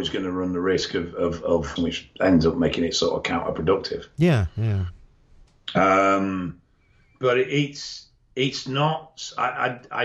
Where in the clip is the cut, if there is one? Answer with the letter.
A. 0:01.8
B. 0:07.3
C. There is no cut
A